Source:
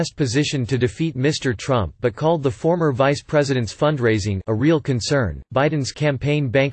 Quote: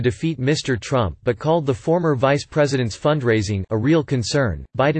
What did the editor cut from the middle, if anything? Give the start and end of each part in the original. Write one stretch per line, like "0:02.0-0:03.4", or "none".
none